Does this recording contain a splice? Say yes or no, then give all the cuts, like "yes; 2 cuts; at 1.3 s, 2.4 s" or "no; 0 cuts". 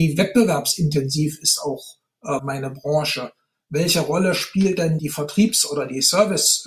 yes; 2 cuts; at 2.4 s, 5.0 s